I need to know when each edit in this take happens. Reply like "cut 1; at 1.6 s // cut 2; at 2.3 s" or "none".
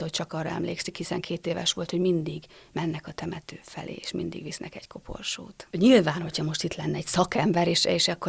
cut 1; at 5.7 s